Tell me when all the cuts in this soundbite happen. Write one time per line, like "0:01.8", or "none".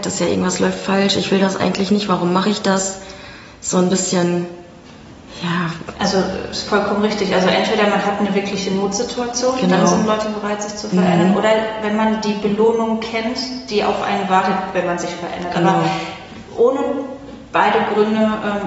none